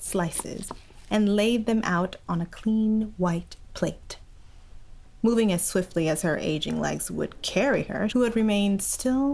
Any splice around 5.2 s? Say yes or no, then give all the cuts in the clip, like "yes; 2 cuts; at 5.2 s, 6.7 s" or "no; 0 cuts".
no; 1 cut; at 8.1 s